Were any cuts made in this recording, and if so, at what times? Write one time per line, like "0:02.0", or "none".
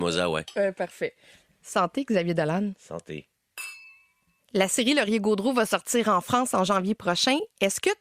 none